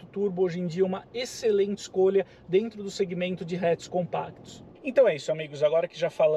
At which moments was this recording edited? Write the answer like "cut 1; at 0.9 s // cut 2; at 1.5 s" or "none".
cut 1; at 4.8 s